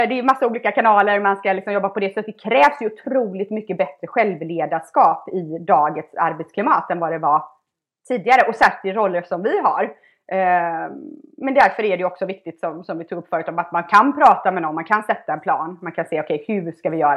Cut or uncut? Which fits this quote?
uncut